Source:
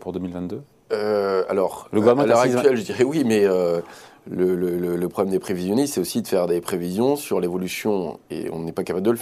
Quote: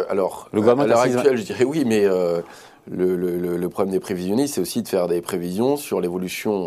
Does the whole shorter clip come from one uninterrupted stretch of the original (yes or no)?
yes